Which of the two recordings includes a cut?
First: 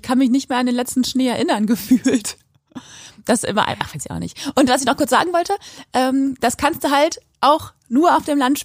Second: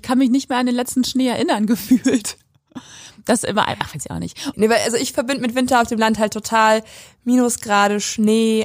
second; 1 cut; at 4.5 s

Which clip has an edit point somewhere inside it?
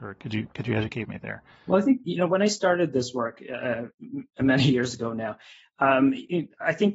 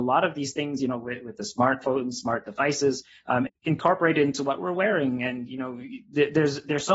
second; 1 cut; at 3.5 s

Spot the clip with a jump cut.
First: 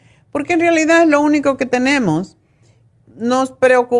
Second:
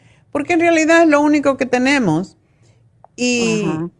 first; 1 cut; at 3.0 s

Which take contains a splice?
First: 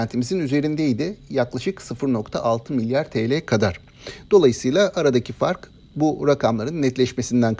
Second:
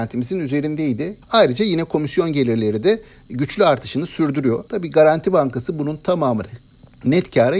second; 2 cuts; at 1.2 s, 4.7 s

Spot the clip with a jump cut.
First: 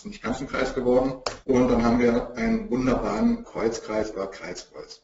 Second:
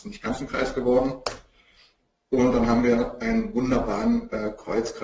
first; 2 cuts; at 1.4 s, 3.4 s

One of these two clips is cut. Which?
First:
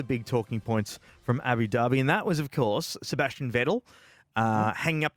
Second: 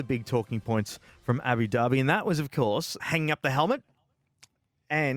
second; 1 cut; at 3.0 s

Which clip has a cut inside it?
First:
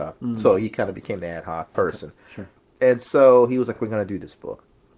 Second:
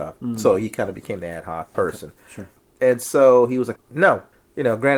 second; 1 cut; at 3.8 s

